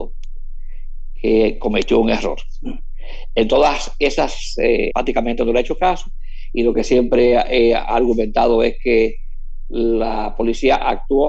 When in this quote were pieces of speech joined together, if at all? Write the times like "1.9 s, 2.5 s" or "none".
4.9 s